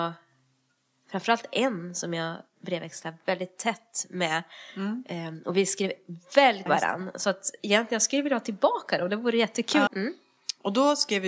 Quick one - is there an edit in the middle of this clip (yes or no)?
yes